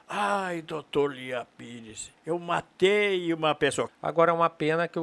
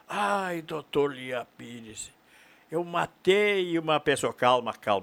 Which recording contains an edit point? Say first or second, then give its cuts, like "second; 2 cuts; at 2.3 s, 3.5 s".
first; 2 cuts; at 2.2 s, 3.9 s